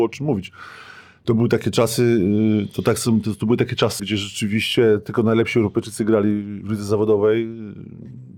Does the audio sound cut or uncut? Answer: cut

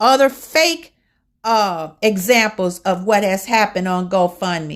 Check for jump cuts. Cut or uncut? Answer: uncut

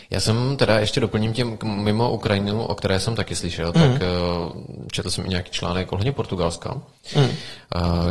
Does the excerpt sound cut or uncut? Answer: uncut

